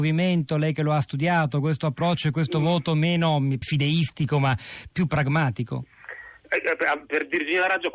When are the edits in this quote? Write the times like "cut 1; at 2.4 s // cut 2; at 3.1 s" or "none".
cut 1; at 3.6 s // cut 2; at 4.9 s